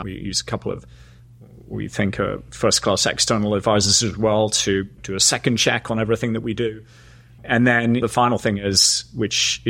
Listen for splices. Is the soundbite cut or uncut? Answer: uncut